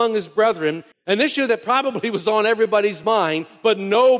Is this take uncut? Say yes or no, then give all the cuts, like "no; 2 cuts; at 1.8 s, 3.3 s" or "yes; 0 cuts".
no; 1 cut; at 0.9 s